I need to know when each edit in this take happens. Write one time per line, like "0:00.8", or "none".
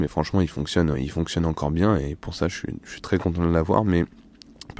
0:00.9